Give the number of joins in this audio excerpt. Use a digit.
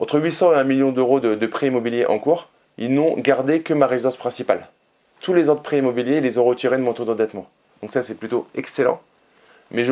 0